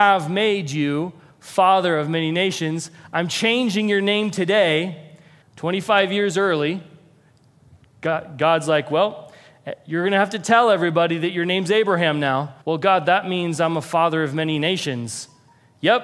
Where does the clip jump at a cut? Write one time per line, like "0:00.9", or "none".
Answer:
0:05.4
0:12.6

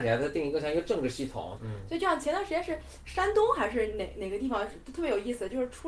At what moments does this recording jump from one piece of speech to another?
0:01.6

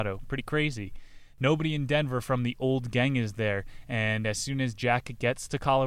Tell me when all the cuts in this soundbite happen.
none

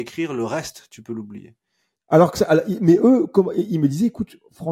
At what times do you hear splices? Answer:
0:02.0

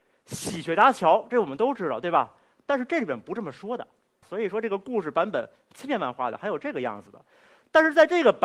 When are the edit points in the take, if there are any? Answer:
0:04.2

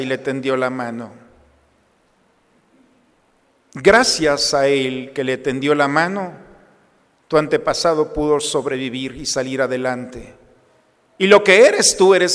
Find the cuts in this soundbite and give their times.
none

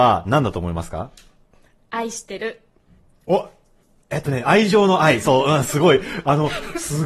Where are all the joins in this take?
none

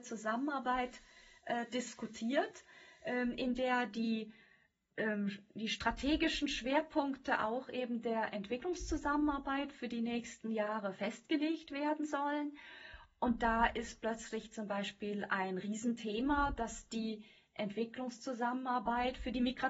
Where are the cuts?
none

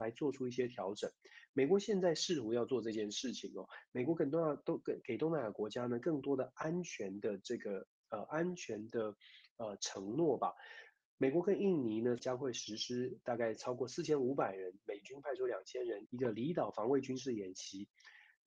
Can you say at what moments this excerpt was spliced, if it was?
0:12.2
0:16.1

